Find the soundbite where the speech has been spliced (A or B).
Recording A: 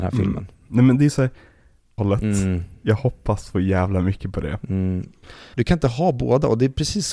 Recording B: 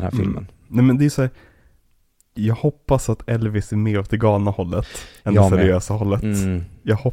A